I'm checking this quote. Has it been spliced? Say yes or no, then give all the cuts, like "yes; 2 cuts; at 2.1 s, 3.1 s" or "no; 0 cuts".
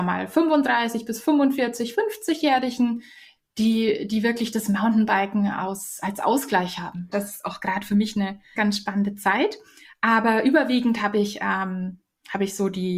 yes; 2 cuts; at 7.1 s, 8.5 s